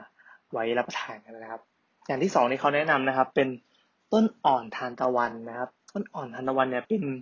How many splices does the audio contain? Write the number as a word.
zero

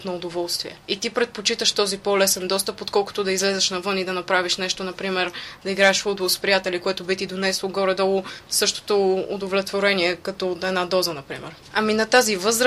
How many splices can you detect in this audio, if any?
one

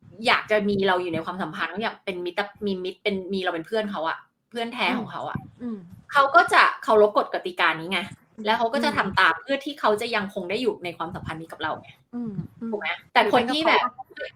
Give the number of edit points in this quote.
one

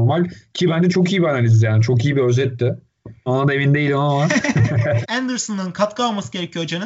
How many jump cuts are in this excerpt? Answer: two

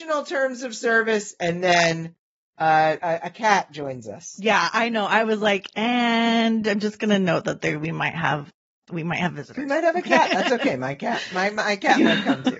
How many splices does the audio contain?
one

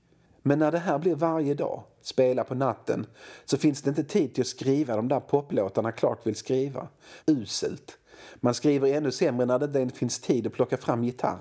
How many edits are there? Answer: two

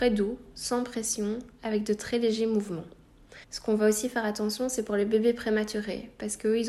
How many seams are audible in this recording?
one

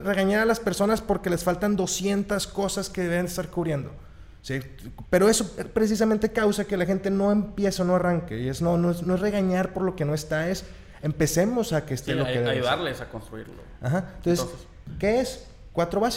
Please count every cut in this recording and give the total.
one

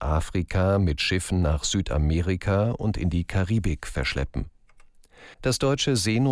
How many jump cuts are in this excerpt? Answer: one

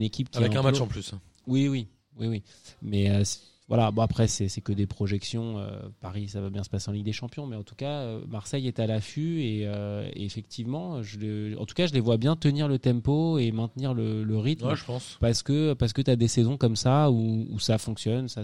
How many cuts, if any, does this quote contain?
zero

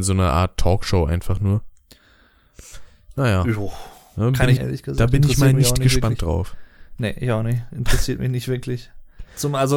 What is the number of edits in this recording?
one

